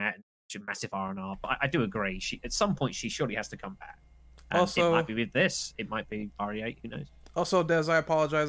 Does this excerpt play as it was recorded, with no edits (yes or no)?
yes